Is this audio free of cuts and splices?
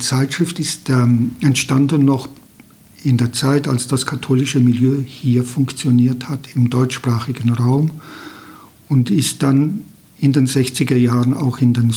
yes; 0 cuts

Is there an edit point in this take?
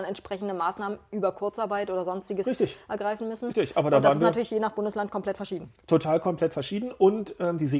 no; 0 cuts

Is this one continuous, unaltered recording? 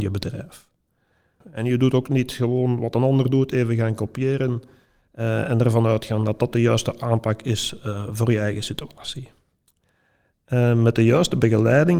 no; 1 cut; at 1.4 s

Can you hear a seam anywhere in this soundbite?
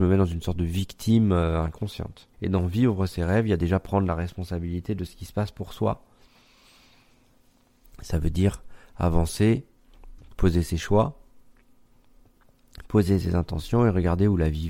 yes; 1 cut; at 2.3 s

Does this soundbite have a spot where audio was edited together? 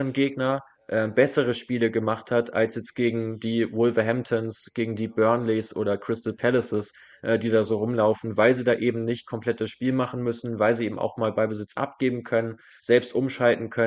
no; 0 cuts

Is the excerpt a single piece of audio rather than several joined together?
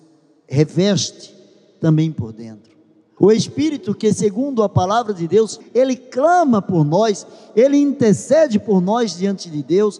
no; 2 cuts; at 3.2 s, 5.6 s

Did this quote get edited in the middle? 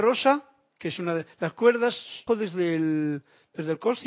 yes; 1 cut; at 2.3 s

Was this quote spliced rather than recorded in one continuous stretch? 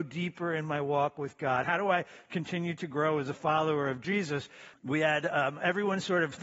yes; 2 cuts; at 1.6 s, 4.7 s

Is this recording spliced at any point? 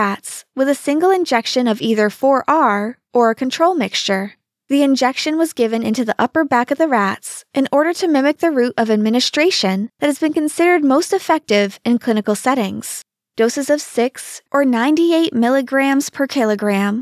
yes; 1 cut; at 14.5 s

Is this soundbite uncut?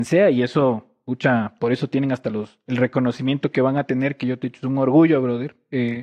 yes; 0 cuts

